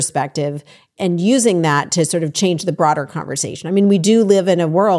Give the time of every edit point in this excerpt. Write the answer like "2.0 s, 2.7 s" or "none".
none